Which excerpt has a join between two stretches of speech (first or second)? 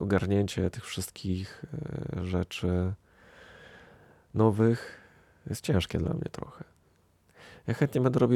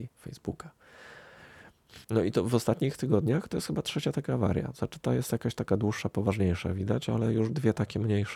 second